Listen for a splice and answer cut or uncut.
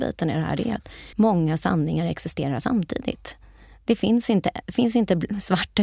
cut